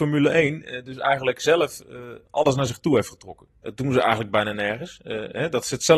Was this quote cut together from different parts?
no; 0 cuts

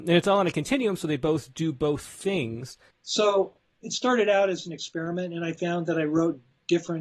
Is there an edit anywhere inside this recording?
yes; 1 cut; at 2.9 s

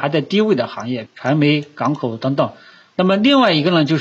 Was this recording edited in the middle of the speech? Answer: yes; 2 cuts; at 1.0 s, 2.9 s

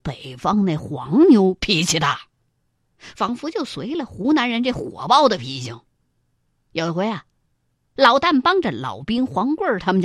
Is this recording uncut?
yes; 0 cuts

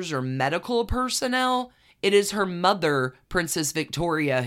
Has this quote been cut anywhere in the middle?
no; 0 cuts

